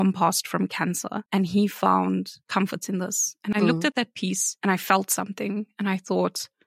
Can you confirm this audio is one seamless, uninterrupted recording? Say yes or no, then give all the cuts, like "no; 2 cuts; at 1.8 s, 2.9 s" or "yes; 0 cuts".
yes; 0 cuts